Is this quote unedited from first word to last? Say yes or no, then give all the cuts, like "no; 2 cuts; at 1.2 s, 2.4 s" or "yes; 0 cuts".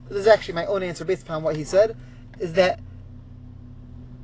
yes; 0 cuts